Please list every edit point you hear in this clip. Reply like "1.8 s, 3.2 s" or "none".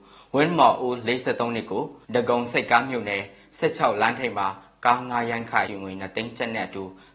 2.0 s, 5.7 s